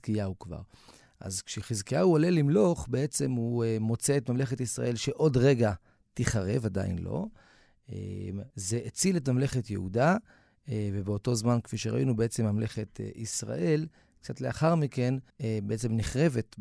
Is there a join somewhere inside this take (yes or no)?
yes